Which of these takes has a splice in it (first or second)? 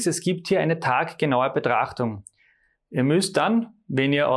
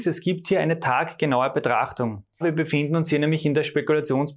second